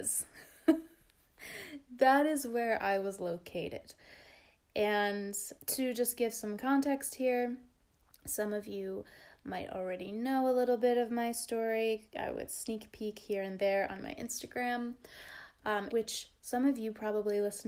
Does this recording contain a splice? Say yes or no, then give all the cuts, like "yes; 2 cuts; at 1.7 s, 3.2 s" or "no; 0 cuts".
yes; 2 cuts; at 5.6 s, 15.9 s